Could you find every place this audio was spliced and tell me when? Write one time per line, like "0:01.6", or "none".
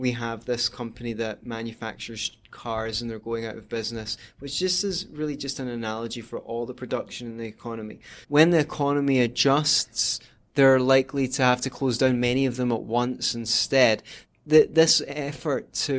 0:08.2
0:14.2